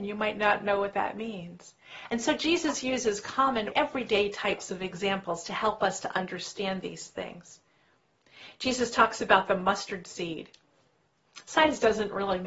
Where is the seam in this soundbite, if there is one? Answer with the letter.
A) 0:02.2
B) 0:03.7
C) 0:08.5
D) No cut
B